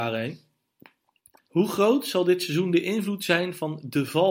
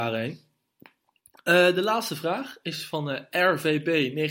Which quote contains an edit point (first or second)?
first